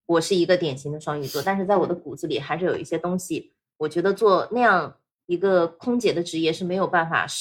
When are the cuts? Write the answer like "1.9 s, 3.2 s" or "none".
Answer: none